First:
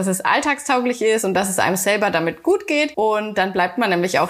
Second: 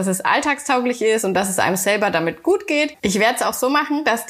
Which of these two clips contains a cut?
second; 1 cut; at 2.9 s

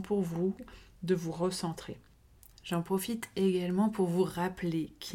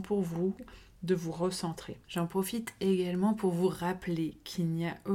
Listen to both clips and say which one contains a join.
second; 1 cut; at 2.0 s

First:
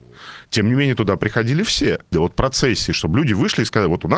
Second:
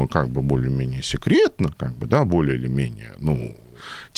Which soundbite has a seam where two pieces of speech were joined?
first; 1 cut; at 2.1 s

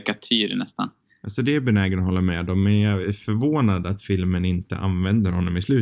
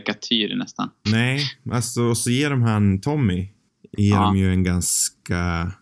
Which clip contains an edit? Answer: second; 1 cut; at 1.1 s

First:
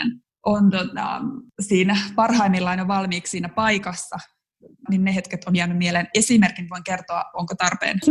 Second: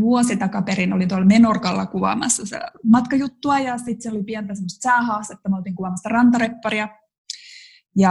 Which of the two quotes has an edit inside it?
first; 1 cut; at 4.9 s

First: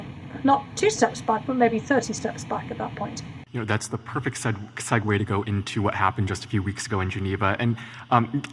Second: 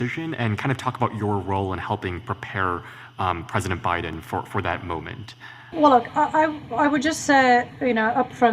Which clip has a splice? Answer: first; 1 cut; at 3.5 s

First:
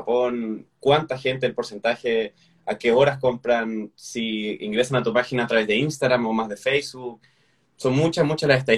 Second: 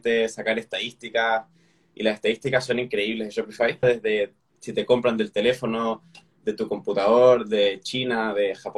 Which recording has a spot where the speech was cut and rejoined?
second; 1 cut; at 3.8 s

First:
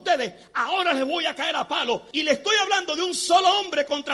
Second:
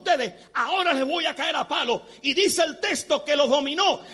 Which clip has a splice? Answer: first; 1 cut; at 2.1 s

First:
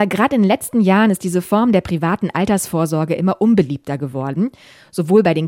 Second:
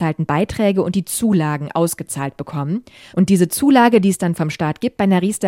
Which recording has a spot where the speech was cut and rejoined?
second; 1 cut; at 3.1 s

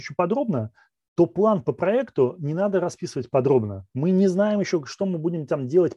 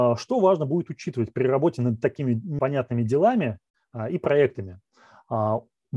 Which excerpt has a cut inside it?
second; 1 cut; at 2.6 s

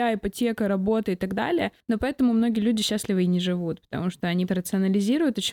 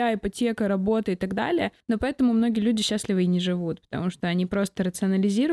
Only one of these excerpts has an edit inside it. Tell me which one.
first; 1 cut; at 4.5 s

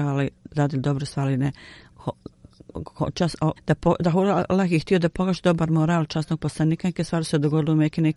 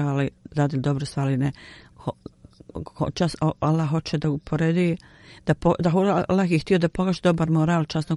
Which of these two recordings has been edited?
first; 1 cut; at 3.6 s

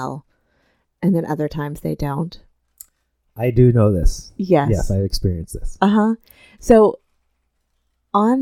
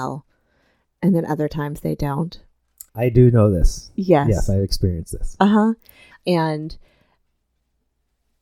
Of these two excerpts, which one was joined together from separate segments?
second; 2 cuts; at 2.9 s, 6.1 s

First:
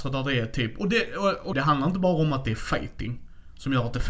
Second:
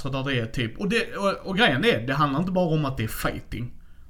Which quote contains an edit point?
first; 1 cut; at 1.5 s

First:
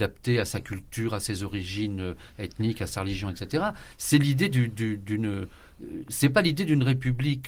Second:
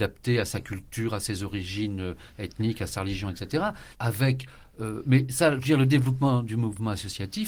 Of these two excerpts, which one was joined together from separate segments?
second; 1 cut; at 3.9 s

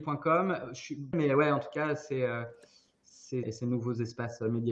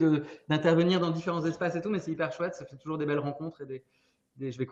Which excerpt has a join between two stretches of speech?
first; 2 cuts; at 1.1 s, 3.4 s

